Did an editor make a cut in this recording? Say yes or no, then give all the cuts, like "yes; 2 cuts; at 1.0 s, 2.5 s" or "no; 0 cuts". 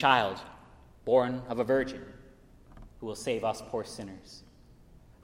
no; 0 cuts